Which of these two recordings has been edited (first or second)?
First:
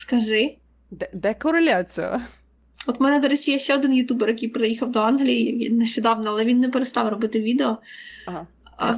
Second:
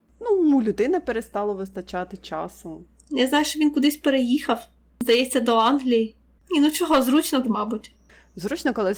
second